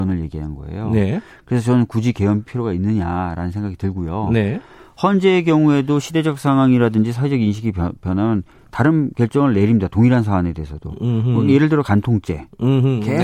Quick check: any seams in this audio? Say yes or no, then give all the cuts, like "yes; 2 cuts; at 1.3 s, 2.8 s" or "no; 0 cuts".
no; 0 cuts